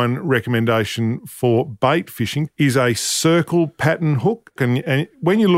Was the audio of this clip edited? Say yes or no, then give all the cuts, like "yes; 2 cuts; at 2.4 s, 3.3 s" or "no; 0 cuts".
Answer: yes; 2 cuts; at 2.5 s, 4.6 s